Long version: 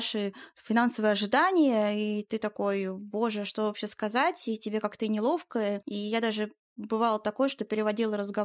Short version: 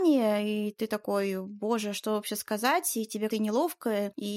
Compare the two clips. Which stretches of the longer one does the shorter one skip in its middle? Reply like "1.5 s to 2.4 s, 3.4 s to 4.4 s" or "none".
4.8 s to 5.0 s

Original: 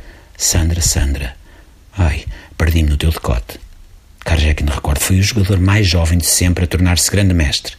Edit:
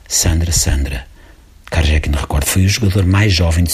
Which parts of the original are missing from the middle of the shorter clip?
1.8 s to 4.1 s

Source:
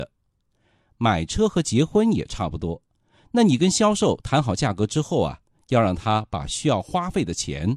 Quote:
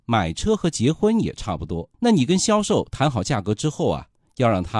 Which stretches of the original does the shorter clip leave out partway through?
2.9 s to 3.3 s

